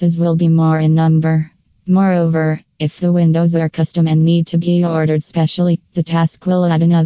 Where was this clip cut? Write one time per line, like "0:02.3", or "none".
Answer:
none